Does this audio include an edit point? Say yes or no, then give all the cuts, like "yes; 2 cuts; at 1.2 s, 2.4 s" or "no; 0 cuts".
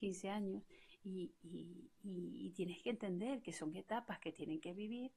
no; 0 cuts